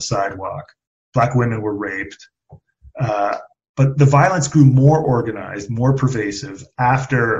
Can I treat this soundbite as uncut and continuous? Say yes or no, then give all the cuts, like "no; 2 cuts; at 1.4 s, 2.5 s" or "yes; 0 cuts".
yes; 0 cuts